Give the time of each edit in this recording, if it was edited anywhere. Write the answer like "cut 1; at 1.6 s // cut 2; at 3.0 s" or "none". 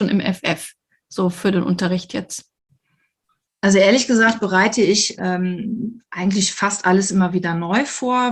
cut 1; at 5.2 s